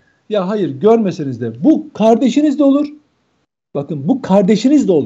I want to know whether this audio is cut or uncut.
uncut